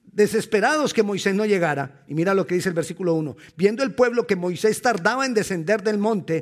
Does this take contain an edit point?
no; 0 cuts

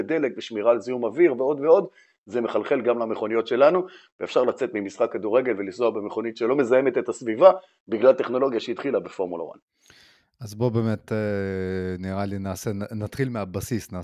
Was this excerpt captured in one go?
yes; 0 cuts

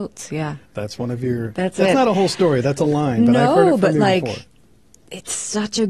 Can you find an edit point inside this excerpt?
no; 0 cuts

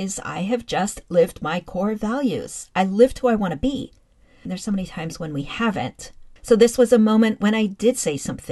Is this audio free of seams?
no; 2 cuts; at 4.5 s, 6.4 s

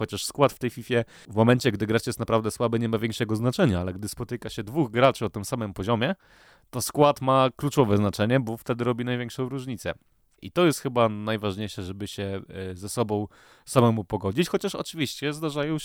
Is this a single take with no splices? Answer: no; 1 cut; at 10.4 s

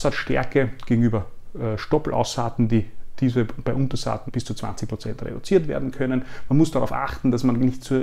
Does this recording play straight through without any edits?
no; 1 cut; at 4.3 s

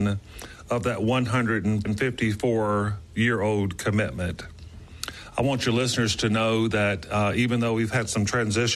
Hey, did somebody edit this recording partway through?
no; 0 cuts

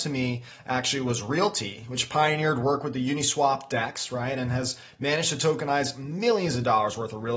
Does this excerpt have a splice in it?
no; 0 cuts

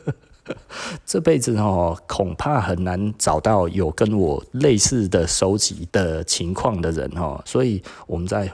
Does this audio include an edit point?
yes; 2 cuts; at 5.9 s, 7.4 s

